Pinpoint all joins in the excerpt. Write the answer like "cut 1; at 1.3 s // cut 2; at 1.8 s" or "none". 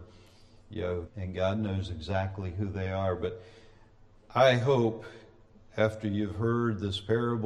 cut 1; at 1.1 s